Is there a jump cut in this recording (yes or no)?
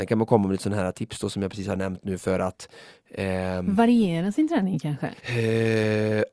yes